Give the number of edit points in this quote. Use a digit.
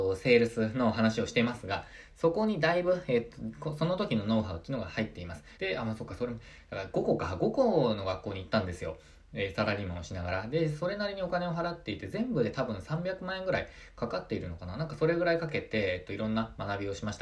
1